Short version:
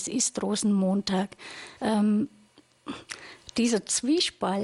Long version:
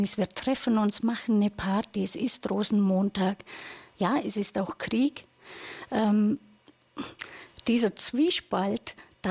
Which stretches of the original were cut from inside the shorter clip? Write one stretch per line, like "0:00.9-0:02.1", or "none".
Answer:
0:03.8-0:05.9